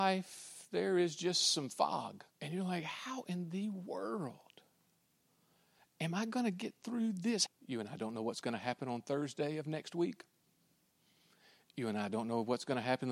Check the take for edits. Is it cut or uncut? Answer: cut